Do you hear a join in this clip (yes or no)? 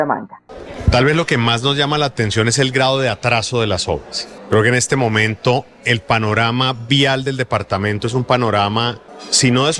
no